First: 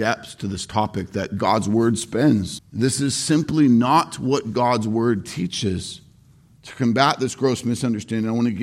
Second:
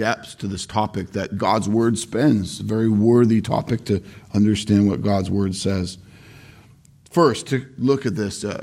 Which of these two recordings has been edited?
first; 2 cuts; at 2.6 s, 6.6 s

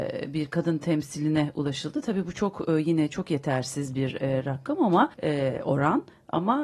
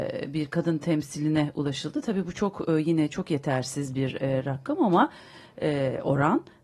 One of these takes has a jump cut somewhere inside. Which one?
first; 1 cut; at 5.1 s

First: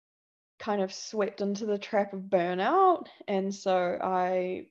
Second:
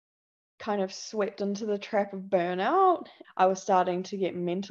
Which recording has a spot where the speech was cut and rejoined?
second; 1 cut; at 3.2 s

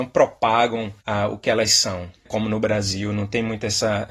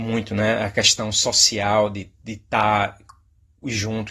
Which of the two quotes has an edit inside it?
first; 2 cuts; at 1.0 s, 2.3 s

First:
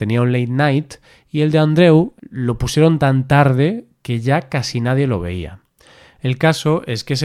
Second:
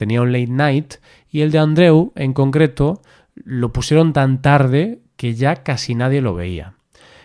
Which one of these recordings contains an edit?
first; 1 cut; at 2.2 s

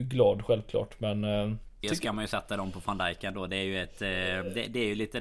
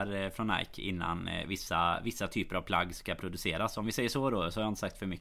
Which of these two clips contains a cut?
first; 1 cut; at 1.8 s

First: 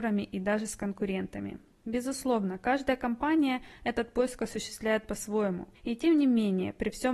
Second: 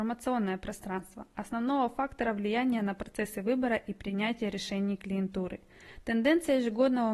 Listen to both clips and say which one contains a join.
first; 1 cut; at 5.7 s

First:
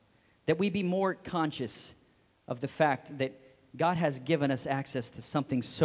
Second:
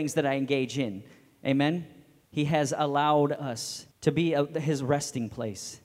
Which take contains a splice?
second; 2 cuts; at 2.3 s, 3.9 s

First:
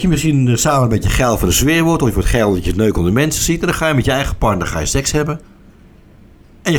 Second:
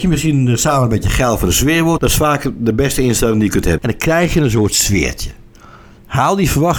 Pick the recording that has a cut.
second; 2 cuts; at 2.0 s, 3.8 s

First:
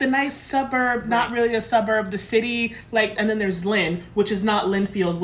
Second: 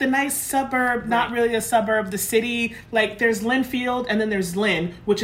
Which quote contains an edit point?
first; 1 cut; at 3.2 s

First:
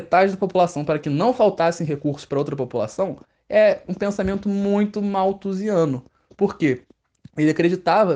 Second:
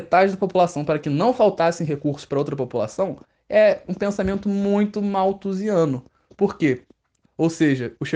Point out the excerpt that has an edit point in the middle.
second; 1 cut; at 7.2 s

